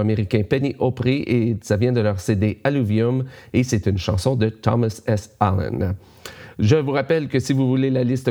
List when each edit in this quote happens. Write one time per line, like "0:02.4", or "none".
none